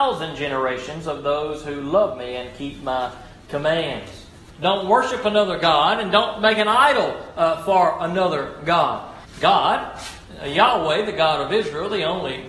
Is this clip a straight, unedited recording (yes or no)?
no